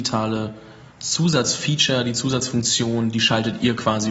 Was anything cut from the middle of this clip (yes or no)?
yes